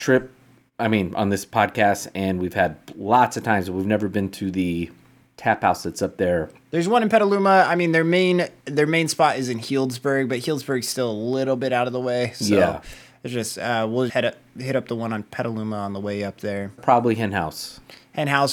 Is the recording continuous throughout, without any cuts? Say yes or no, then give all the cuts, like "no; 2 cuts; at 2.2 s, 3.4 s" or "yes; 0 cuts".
no; 2 cuts; at 14.1 s, 16.8 s